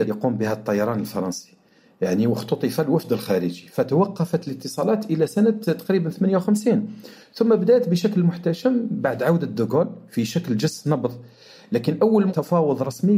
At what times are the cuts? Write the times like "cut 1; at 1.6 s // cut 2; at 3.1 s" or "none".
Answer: none